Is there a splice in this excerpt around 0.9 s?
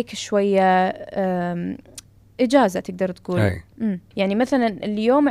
no; 1 cut; at 4.1 s

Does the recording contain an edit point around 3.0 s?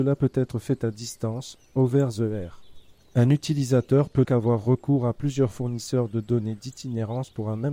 no; 1 cut; at 4.2 s

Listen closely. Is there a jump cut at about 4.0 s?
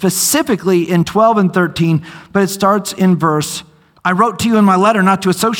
yes; 1 cut; at 4.0 s

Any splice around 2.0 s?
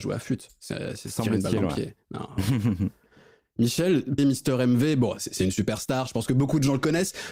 no; 1 cut; at 4.2 s

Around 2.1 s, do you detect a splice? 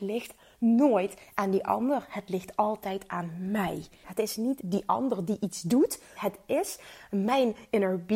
no; 2 cuts; at 4.0 s, 6.2 s

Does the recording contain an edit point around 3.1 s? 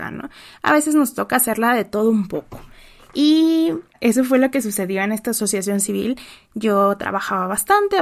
no; 0 cuts

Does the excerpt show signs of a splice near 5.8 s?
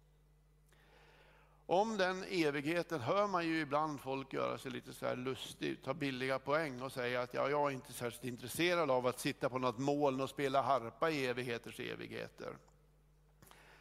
no; 0 cuts

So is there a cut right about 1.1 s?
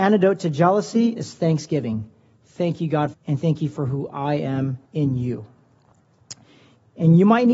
no; 2 cuts; at 3.1 s, 4.8 s

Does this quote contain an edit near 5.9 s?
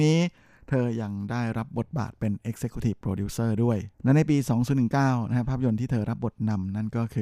no; 1 cut; at 3.9 s

